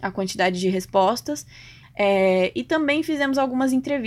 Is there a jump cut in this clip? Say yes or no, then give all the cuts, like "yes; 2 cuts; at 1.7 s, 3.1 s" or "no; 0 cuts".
yes; 1 cut; at 1.8 s